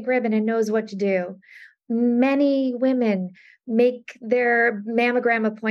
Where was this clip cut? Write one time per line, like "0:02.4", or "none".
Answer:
none